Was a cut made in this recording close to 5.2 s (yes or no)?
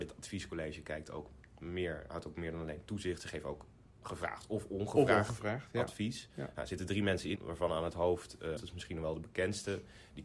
no